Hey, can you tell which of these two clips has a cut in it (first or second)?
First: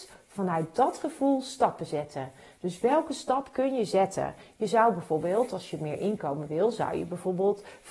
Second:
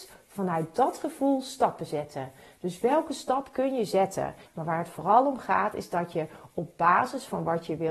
second